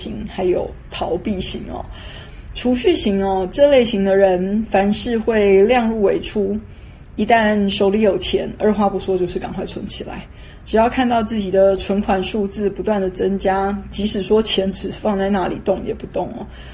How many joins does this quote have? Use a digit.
1